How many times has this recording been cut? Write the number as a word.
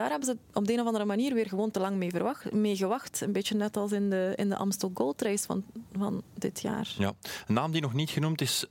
zero